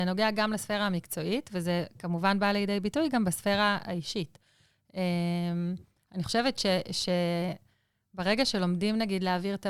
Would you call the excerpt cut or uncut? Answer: uncut